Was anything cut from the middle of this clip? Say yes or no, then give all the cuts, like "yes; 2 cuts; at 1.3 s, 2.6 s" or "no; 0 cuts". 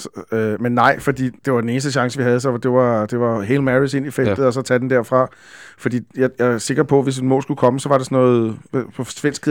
yes; 1 cut; at 1.4 s